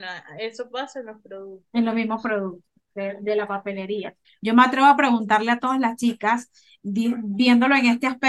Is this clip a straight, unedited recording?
no; 1 cut; at 4.2 s

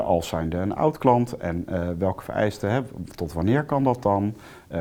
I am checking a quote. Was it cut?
no; 0 cuts

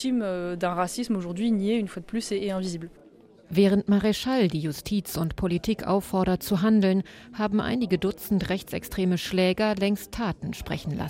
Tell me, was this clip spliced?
no; 0 cuts

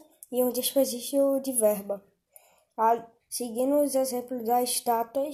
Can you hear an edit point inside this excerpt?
yes; 1 cut; at 3.2 s

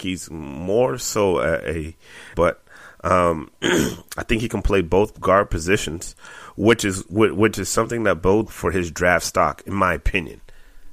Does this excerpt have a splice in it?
yes; 2 cuts; at 2.3 s, 8.5 s

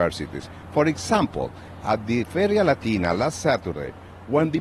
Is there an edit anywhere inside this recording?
no; 0 cuts

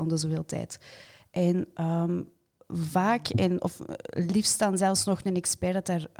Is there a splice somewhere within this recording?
no; 0 cuts

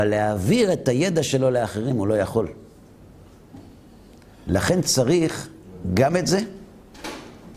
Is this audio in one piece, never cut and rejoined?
yes; 0 cuts

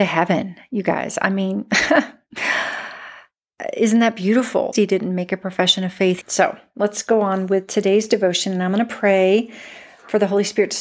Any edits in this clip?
yes; 2 cuts; at 4.7 s, 6.2 s

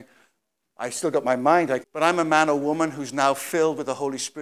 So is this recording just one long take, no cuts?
no; 1 cut; at 1.8 s

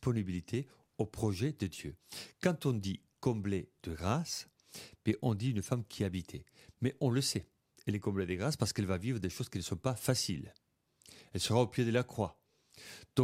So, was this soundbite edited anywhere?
no; 0 cuts

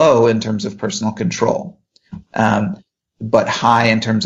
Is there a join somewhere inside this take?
no; 0 cuts

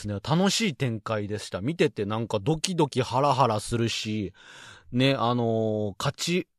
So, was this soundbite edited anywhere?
no; 0 cuts

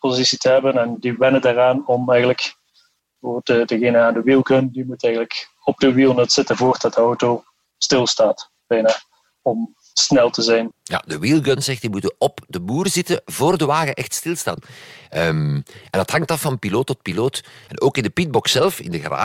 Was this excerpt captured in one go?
no; 3 cuts; at 10.7 s, 14.6 s, 17.7 s

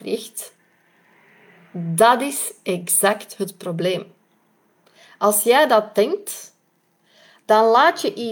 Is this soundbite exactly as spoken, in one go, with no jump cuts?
yes; 0 cuts

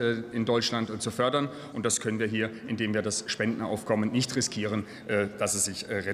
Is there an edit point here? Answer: yes; 1 cut; at 1.7 s

